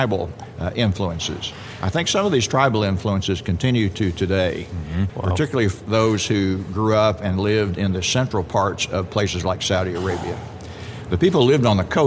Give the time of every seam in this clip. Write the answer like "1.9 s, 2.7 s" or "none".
5.1 s